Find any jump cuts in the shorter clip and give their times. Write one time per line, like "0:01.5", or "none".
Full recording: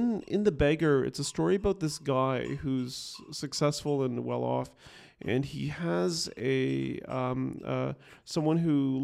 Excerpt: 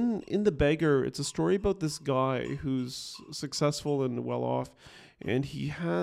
none

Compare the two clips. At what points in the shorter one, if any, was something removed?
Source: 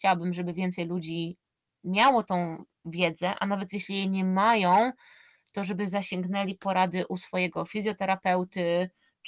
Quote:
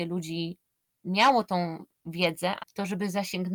0:02.6

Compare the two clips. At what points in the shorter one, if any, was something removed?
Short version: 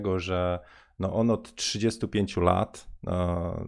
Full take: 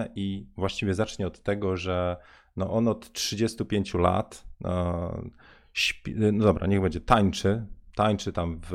none

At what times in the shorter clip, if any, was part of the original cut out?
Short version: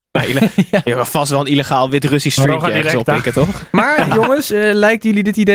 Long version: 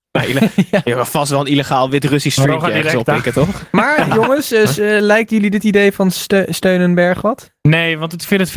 0:04.5

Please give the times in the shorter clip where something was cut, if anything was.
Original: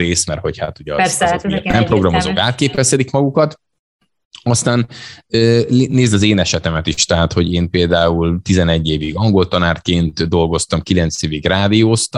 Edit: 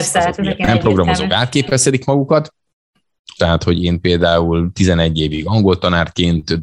0:03.4

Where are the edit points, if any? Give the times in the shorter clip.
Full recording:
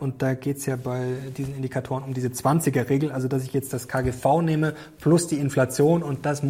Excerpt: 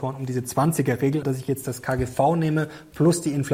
0:01.2

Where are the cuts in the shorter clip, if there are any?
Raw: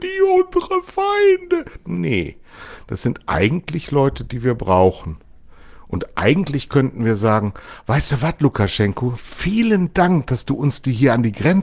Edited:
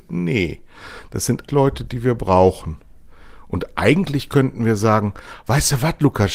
0:01.5

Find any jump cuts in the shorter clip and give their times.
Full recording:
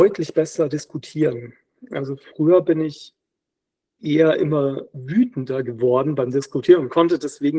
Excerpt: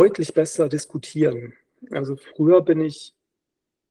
none

